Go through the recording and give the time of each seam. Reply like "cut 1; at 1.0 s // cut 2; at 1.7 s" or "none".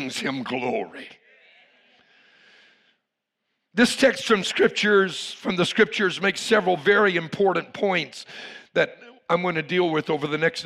none